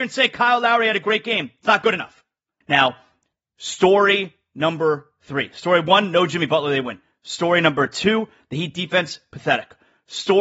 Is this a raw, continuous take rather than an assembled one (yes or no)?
no